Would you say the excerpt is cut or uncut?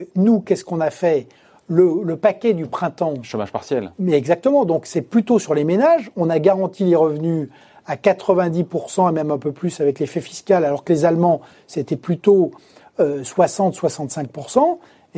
uncut